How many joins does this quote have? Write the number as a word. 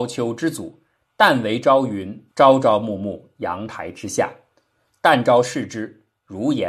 one